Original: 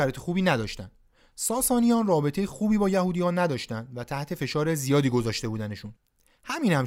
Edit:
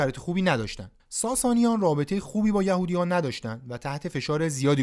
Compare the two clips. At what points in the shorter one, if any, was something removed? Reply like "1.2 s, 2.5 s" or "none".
1.0 s